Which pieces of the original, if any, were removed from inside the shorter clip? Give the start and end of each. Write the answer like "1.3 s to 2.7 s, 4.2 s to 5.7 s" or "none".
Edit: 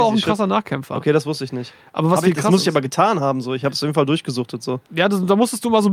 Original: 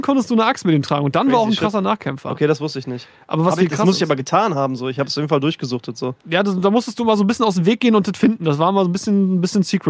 none